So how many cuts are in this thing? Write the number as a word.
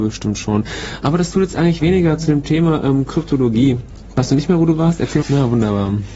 two